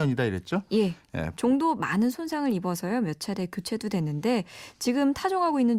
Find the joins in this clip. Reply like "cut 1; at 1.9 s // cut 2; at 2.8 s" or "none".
cut 1; at 1.3 s